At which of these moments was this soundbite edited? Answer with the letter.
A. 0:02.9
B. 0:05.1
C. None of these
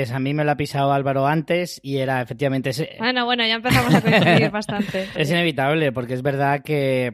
B